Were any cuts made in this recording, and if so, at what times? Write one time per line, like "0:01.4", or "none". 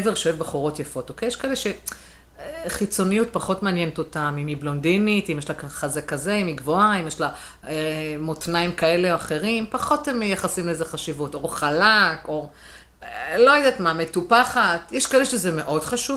none